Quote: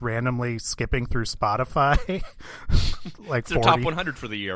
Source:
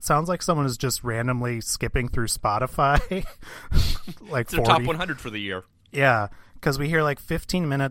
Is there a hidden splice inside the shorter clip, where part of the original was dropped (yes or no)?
no